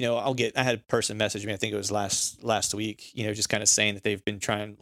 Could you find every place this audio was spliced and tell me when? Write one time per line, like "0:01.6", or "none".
none